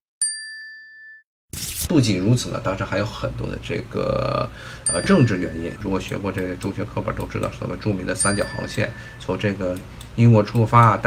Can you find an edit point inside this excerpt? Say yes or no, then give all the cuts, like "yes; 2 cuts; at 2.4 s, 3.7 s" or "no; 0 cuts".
yes; 2 cuts; at 1.9 s, 5.8 s